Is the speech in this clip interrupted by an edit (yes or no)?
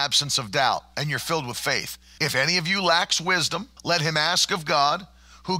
yes